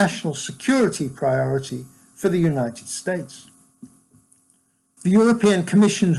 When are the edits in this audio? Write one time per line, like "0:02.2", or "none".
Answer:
0:05.0